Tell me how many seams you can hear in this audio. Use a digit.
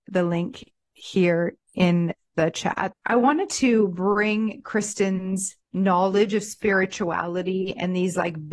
2